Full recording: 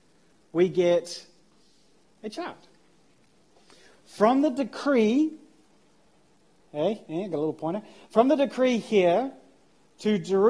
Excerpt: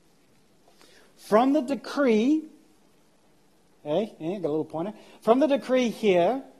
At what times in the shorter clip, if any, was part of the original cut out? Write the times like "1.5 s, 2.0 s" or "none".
none